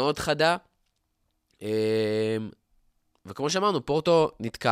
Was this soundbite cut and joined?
no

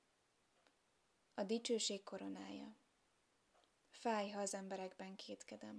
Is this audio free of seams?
yes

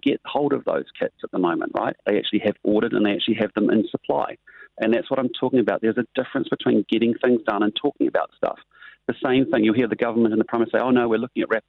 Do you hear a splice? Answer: yes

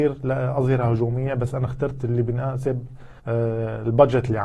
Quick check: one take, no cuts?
no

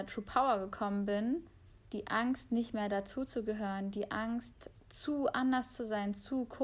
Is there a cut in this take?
yes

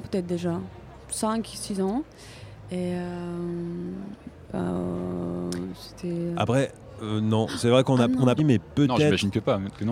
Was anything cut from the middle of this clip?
yes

